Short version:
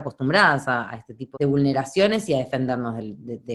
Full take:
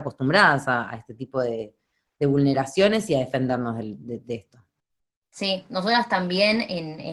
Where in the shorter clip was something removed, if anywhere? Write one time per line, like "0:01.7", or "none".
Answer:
0:01.3